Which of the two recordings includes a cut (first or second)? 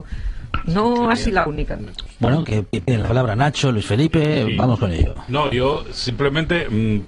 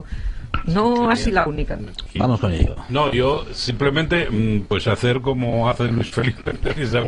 second